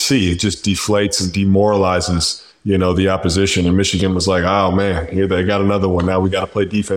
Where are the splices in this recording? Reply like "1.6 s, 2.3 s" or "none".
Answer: none